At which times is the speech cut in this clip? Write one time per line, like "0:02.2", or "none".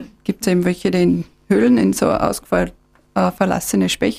none